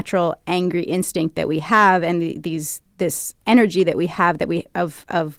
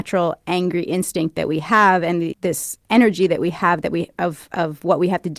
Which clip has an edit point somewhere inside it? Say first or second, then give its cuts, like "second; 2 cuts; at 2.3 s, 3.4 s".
second; 1 cut; at 2.3 s